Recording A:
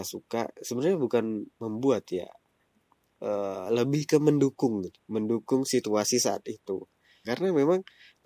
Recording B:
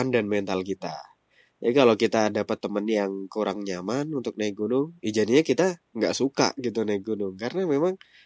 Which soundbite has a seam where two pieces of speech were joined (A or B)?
A